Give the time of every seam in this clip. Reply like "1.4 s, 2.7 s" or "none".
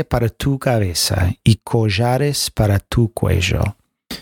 none